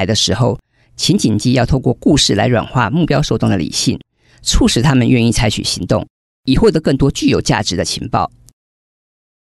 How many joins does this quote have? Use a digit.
0